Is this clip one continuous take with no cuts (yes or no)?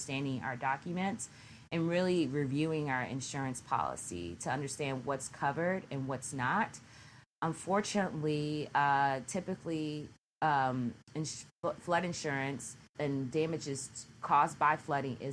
no